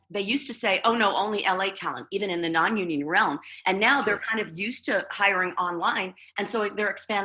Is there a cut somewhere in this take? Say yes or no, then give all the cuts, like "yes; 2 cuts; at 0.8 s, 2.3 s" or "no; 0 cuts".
no; 0 cuts